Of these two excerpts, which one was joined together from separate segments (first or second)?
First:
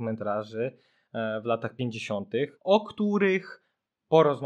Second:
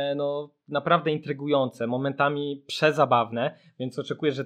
first